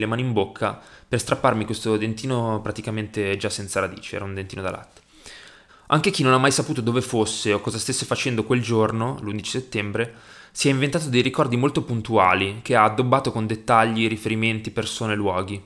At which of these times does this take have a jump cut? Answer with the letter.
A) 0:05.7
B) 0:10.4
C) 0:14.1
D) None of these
A